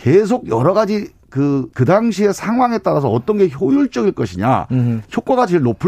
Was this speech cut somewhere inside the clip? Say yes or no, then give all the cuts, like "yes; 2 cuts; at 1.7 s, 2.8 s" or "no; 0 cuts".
yes; 1 cut; at 1.7 s